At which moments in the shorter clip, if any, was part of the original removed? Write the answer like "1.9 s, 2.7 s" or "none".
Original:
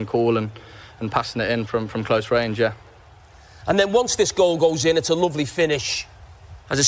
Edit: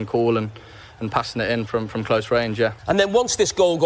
2.8 s